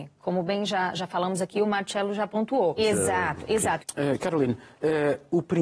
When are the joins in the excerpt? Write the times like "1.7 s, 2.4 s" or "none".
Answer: 2.8 s, 3.8 s